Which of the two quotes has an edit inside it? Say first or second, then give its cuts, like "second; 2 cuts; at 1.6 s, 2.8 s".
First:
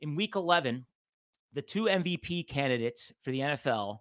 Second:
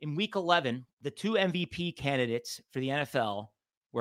second; 1 cut; at 0.9 s